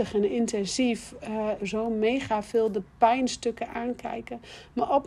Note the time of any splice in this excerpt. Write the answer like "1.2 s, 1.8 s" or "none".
1.6 s